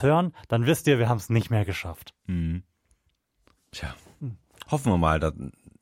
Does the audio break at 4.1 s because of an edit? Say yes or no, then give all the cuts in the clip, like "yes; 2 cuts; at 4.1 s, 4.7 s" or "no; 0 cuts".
no; 0 cuts